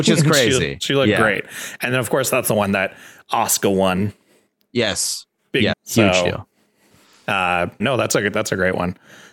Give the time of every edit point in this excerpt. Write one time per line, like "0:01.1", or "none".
0:05.7
0:07.8